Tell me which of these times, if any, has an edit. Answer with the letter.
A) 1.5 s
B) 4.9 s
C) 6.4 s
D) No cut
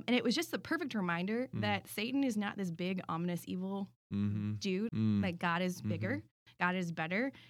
B